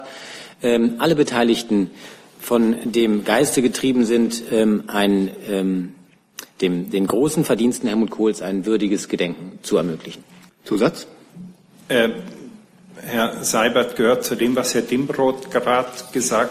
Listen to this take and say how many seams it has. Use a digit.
1